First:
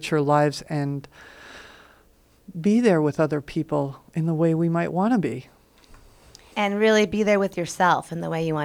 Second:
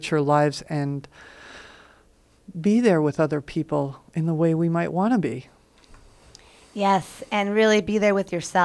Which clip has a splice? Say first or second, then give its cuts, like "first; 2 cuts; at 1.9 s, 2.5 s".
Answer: first; 1 cut; at 6.5 s